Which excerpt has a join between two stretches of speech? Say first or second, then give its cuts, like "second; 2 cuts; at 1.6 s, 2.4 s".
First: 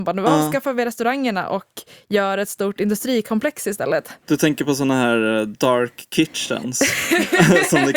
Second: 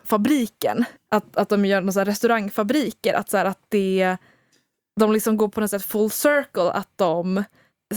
second; 1 cut; at 1.0 s